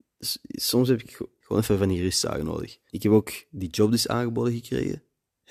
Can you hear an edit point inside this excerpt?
yes; 2 cuts; at 1.4 s, 2.9 s

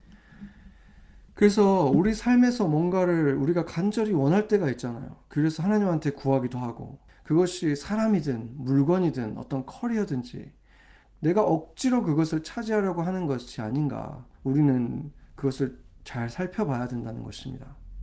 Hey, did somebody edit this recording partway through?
yes; 2 cuts; at 7.1 s, 14.3 s

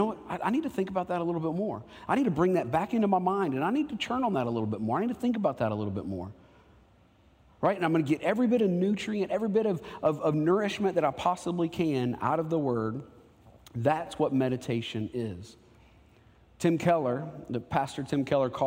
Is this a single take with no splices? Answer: yes; 0 cuts

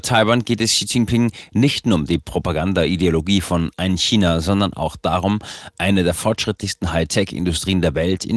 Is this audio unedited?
yes; 0 cuts

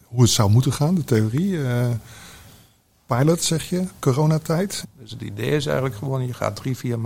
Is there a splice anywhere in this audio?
yes; 1 cut; at 4.8 s

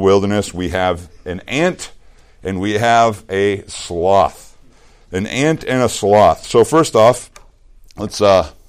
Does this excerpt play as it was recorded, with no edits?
yes; 0 cuts

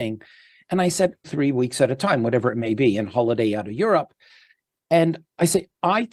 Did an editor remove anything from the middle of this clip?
yes; 1 cut; at 1.2 s

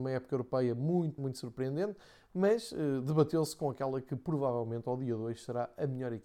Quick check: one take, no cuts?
no; 1 cut; at 1.2 s

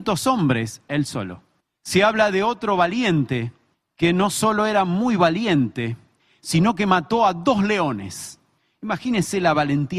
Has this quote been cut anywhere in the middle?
no; 0 cuts

